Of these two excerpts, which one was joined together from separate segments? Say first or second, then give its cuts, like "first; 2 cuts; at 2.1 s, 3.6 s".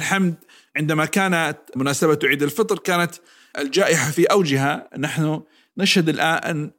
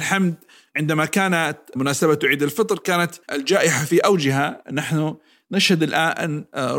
second; 1 cut; at 3.2 s